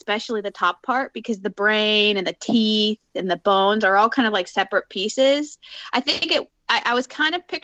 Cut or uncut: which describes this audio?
uncut